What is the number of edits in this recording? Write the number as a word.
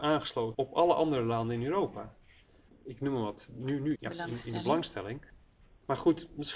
two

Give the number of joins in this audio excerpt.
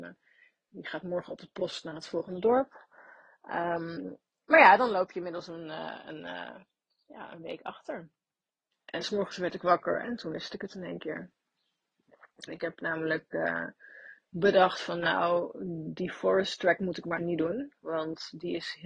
three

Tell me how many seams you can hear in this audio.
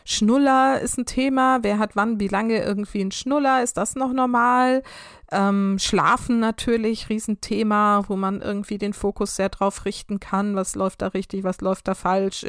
zero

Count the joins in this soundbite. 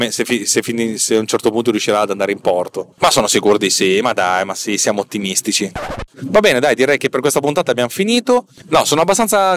one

